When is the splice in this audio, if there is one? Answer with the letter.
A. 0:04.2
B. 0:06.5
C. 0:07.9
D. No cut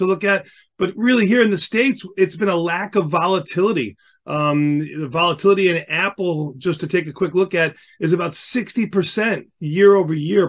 D